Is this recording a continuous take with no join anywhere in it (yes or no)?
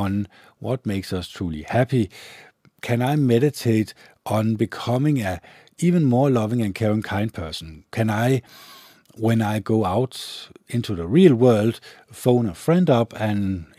yes